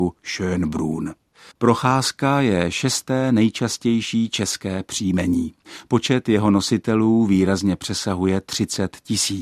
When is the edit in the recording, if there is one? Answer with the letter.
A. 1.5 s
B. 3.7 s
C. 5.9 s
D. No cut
A